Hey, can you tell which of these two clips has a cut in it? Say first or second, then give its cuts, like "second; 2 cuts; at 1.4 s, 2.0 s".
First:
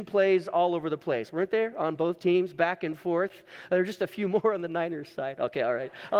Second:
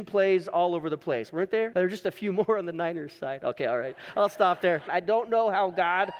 second; 2 cuts; at 1.7 s, 4.9 s